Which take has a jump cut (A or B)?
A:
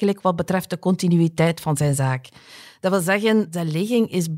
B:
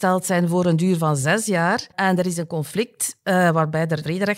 B